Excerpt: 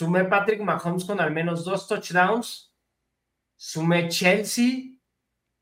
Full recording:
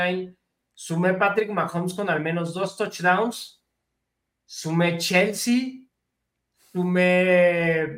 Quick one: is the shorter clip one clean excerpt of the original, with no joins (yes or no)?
yes